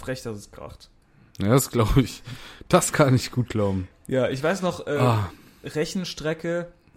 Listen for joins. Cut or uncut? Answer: uncut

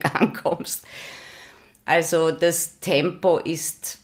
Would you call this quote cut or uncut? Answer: uncut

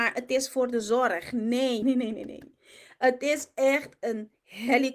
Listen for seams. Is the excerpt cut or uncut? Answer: cut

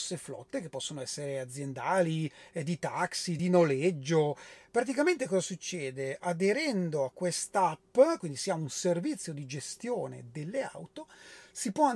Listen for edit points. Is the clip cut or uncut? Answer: uncut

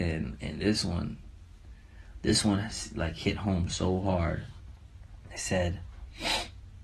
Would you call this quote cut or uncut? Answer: uncut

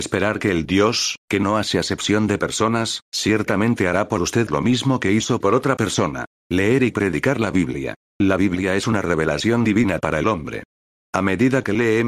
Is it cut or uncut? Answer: uncut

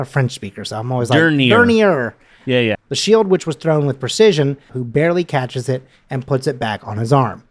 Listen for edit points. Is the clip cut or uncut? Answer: cut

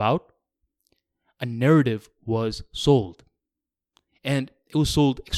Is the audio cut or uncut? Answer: uncut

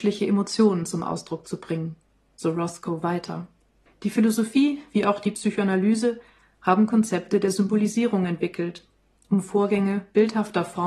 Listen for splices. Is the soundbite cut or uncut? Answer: cut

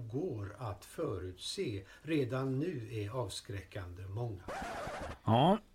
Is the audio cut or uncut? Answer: uncut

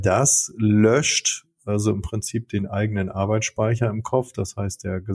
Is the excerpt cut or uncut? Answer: uncut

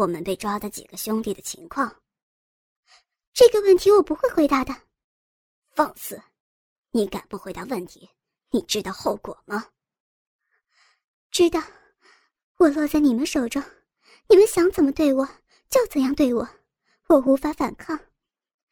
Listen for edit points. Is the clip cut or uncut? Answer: uncut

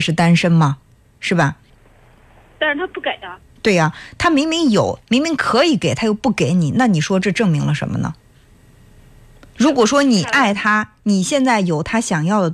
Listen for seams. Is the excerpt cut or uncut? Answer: uncut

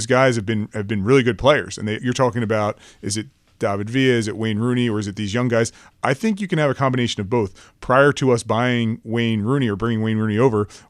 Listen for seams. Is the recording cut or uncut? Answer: cut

